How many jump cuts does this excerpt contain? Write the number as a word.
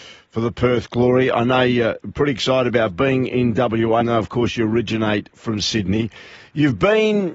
one